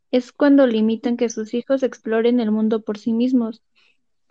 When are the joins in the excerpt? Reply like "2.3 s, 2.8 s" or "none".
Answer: none